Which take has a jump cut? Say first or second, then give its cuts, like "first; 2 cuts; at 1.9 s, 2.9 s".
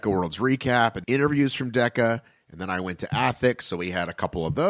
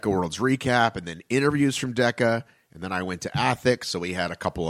first; 1 cut; at 1.0 s